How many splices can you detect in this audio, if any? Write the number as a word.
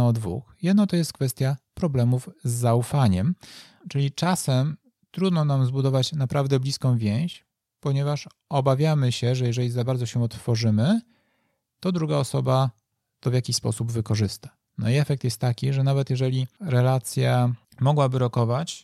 one